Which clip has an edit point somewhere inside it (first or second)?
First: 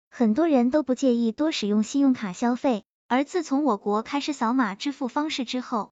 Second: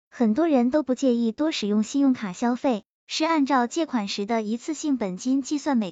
second